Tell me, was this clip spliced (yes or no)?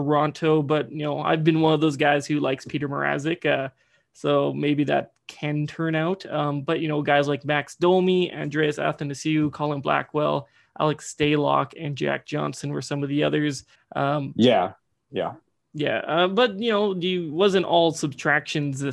yes